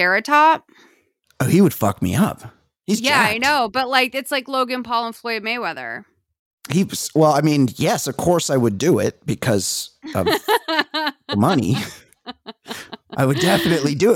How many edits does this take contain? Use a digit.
0